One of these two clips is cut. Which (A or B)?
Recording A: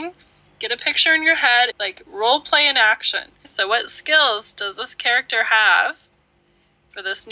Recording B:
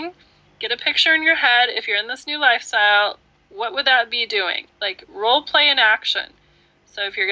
A